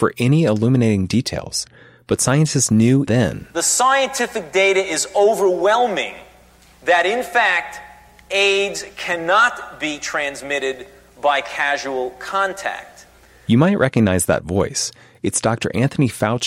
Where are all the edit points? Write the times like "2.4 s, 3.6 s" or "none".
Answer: 3.1 s